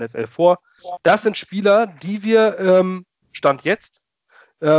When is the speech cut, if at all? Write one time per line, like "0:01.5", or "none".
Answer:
0:01.0
0:03.2